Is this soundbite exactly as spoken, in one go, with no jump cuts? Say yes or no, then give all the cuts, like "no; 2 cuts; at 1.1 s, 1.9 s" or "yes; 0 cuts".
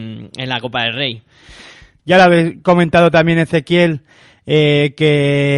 no; 1 cut; at 2.0 s